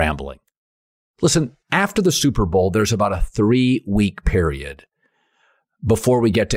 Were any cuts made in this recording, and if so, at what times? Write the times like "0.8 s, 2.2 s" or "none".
1.6 s